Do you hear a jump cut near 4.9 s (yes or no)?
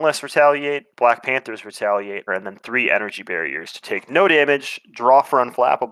no